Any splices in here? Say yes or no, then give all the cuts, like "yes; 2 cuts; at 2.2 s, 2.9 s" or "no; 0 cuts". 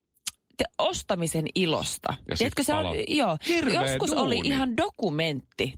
no; 0 cuts